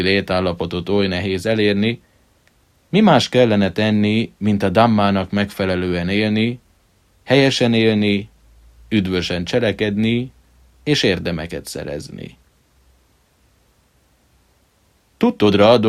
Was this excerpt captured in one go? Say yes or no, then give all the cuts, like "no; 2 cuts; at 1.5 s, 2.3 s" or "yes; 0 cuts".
yes; 0 cuts